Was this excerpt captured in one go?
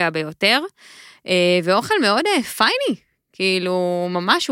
yes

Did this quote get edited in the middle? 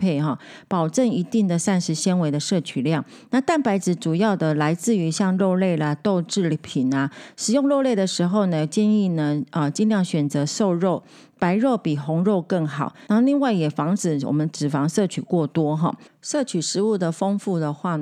yes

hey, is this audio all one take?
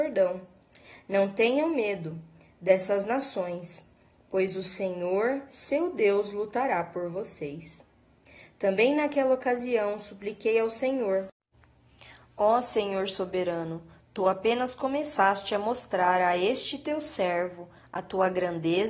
yes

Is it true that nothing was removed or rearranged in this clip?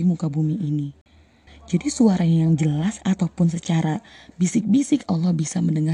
no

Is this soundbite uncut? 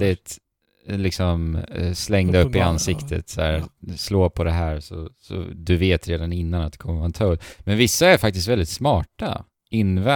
yes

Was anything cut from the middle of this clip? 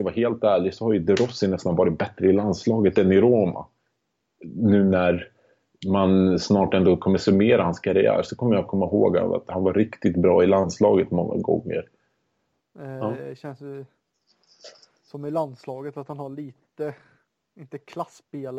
yes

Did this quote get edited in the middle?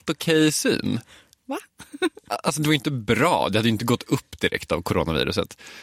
no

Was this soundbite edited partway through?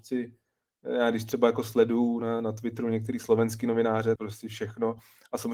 yes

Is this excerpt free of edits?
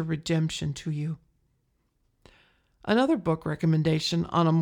yes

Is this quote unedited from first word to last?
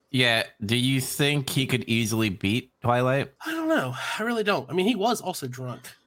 no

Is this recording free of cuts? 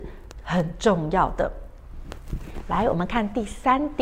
yes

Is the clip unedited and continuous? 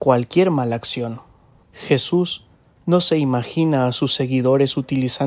no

